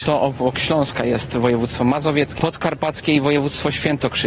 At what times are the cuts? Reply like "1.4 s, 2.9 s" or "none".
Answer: 2.4 s